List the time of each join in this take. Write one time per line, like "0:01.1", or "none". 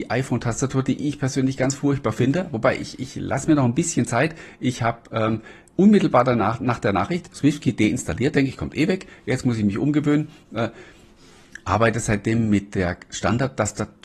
none